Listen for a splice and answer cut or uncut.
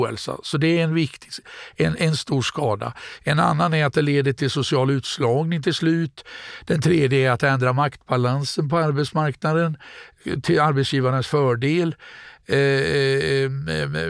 uncut